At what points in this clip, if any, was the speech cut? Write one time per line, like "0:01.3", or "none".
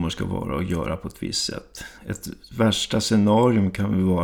none